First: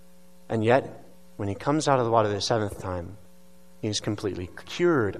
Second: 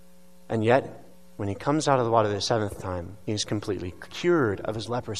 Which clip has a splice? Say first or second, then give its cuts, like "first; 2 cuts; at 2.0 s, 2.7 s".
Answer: second; 1 cut; at 3.2 s